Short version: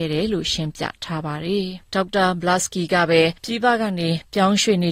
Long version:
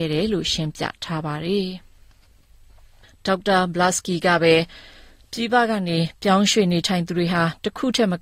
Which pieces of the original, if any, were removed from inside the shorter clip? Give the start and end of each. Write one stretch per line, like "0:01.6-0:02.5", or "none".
0:01.8-0:03.2
0:04.7-0:05.3